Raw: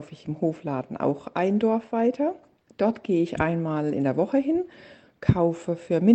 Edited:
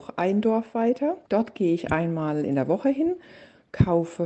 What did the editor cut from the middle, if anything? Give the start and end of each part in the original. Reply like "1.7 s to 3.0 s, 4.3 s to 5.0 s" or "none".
2.4 s to 2.7 s